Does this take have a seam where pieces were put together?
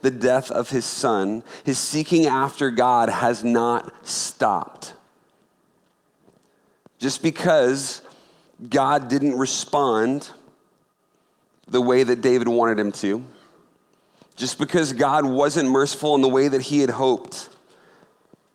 no; 0 cuts

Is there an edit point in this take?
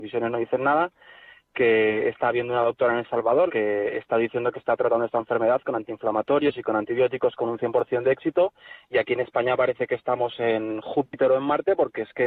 yes; 1 cut; at 3.5 s

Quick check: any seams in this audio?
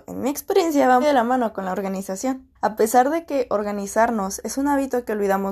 yes; 2 cuts; at 1.0 s, 2.6 s

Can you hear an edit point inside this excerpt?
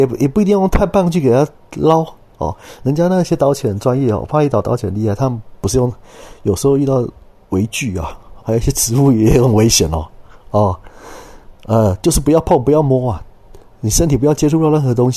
yes; 1 cut; at 8.4 s

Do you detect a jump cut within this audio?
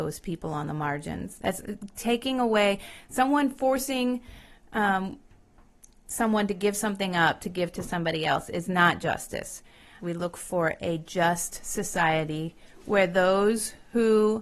yes; 2 cuts; at 1.4 s, 10.0 s

